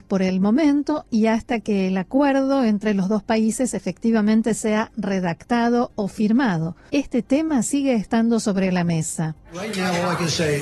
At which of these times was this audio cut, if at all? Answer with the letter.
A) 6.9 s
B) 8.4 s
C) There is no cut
A